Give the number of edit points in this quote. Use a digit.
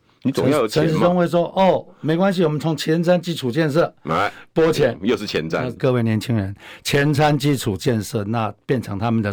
1